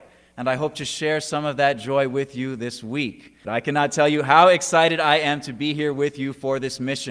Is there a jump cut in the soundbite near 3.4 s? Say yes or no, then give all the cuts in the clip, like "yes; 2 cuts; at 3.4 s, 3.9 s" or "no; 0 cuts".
yes; 1 cut; at 3.4 s